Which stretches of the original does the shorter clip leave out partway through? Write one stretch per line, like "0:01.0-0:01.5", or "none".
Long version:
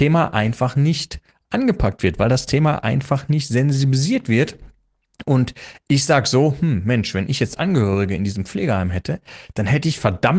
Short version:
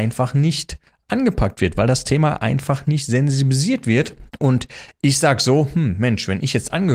0:04.7-0:05.2